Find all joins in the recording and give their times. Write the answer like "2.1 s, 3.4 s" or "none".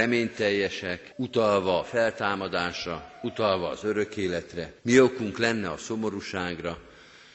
1.1 s, 4.8 s